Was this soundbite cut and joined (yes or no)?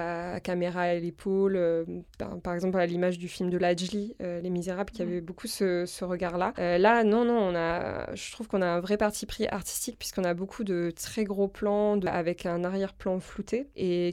no